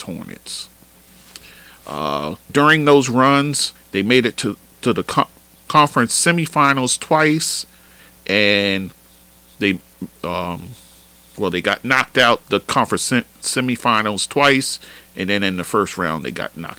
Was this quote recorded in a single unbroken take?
no; 1 cut; at 2.5 s

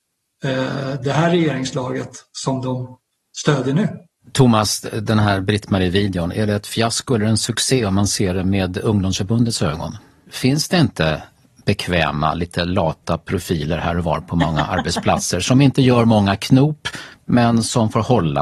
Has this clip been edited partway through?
yes; 1 cut; at 10.2 s

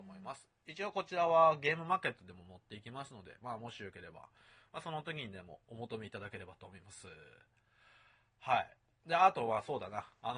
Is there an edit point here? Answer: no; 0 cuts

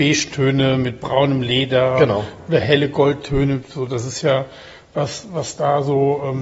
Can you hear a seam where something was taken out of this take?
no; 0 cuts

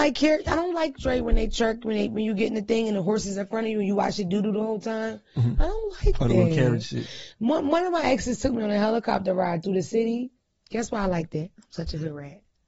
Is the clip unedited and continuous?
yes; 0 cuts

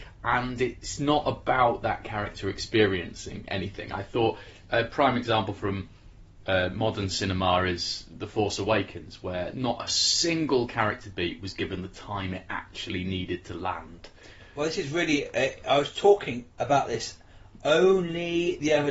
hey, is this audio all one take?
yes; 0 cuts

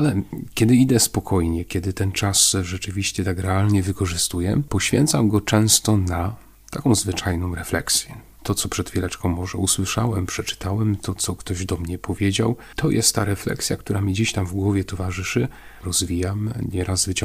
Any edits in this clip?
yes; 2 cuts; at 8.4 s, 15.8 s

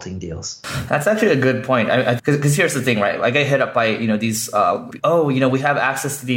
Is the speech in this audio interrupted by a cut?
yes; 2 cuts; at 2.2 s, 5.0 s

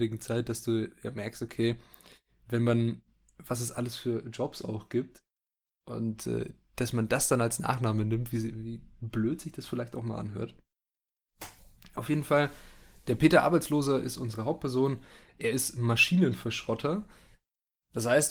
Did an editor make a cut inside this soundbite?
no; 0 cuts

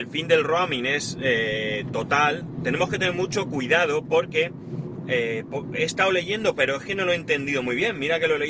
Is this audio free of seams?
yes; 0 cuts

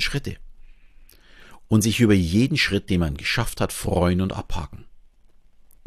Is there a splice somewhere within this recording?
no; 0 cuts

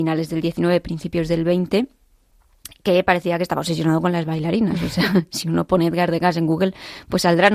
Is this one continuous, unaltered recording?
yes; 0 cuts

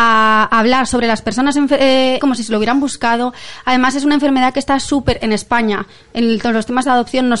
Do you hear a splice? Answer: yes; 1 cut; at 2.2 s

